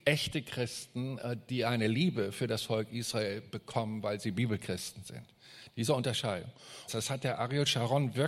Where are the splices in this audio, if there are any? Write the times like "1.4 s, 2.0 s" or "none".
6.9 s